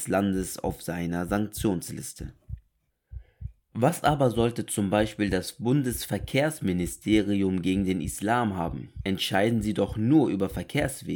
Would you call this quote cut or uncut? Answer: uncut